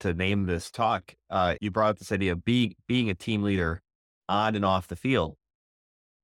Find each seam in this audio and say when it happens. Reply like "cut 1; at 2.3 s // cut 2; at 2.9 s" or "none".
cut 1; at 1.6 s